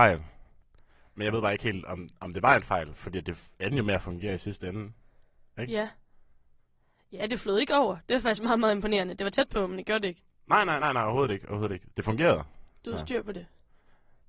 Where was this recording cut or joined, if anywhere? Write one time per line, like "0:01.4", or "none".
none